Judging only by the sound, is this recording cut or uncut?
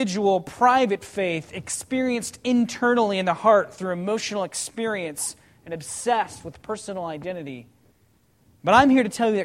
uncut